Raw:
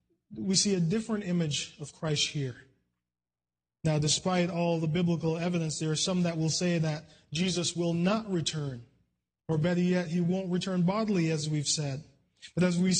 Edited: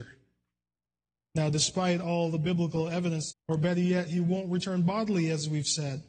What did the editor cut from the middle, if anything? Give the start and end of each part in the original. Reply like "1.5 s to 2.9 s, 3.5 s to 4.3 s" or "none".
5.8 s to 9.3 s